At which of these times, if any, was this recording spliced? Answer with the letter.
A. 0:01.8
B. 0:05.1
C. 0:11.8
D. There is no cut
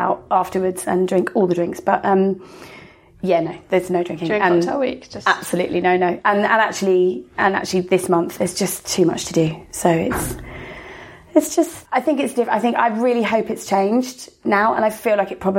C